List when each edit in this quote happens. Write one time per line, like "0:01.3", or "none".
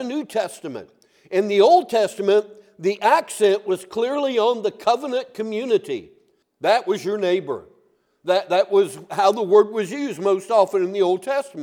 0:06.4